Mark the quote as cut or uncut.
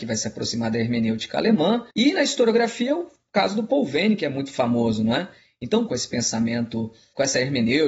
cut